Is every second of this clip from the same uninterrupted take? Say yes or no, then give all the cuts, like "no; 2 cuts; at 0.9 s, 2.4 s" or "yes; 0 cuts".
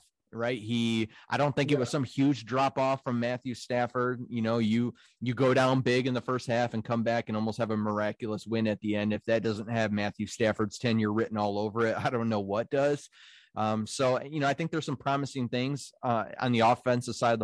yes; 0 cuts